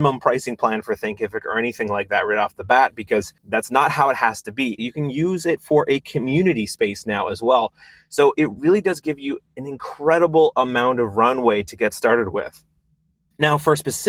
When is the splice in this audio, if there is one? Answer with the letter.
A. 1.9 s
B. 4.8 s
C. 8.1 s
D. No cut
B